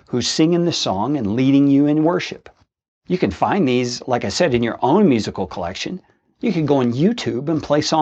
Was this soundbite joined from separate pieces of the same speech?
no; 0 cuts

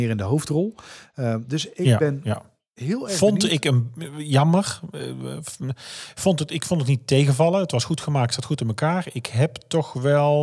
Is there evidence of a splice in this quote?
no; 0 cuts

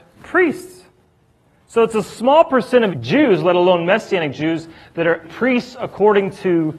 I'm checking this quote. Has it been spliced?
yes; 2 cuts; at 2.9 s, 5.2 s

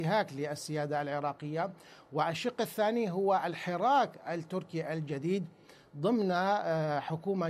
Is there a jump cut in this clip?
no; 0 cuts

